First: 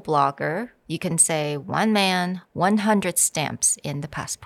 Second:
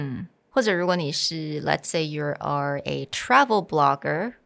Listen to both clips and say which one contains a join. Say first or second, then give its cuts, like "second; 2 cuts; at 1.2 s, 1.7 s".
first; 1 cut; at 2.4 s